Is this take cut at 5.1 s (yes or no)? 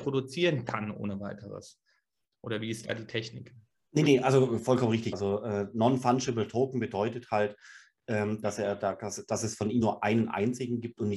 yes